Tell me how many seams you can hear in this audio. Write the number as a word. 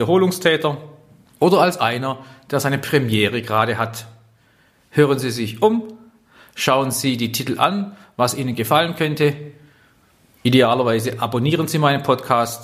zero